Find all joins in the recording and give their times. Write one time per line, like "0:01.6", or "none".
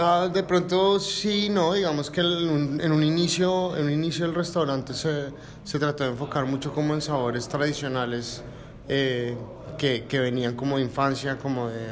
none